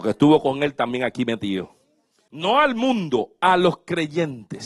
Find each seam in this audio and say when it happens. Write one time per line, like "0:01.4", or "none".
0:02.3